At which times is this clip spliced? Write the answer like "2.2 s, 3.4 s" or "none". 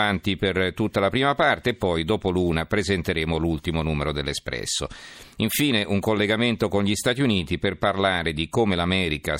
none